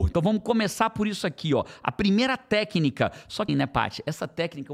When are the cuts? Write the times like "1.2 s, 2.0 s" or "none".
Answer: 3.5 s